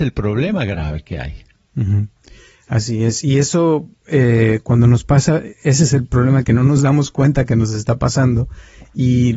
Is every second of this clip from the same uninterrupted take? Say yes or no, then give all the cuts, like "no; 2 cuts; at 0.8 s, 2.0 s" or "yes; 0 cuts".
yes; 0 cuts